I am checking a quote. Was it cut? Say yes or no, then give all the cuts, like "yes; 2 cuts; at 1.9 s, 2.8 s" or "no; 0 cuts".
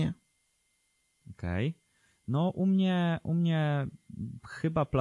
no; 0 cuts